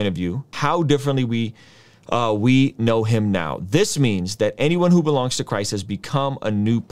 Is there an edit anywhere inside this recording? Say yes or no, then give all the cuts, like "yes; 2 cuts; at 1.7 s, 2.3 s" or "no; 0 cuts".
no; 0 cuts